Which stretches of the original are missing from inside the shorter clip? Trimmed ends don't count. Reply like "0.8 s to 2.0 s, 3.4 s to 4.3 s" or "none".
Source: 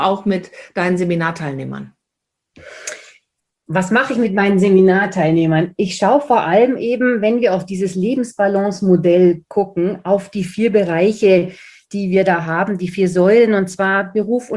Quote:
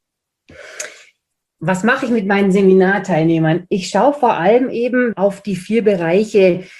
7.2 s to 10.0 s